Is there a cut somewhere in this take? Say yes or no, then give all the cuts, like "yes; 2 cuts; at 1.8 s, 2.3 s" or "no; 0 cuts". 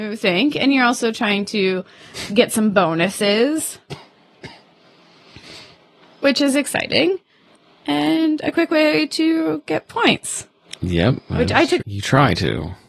yes; 2 cuts; at 10.8 s, 11.8 s